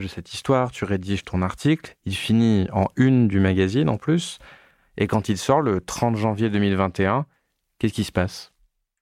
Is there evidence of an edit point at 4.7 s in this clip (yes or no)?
no